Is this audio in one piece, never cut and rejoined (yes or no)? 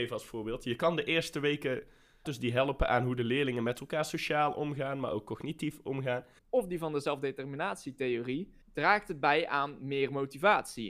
no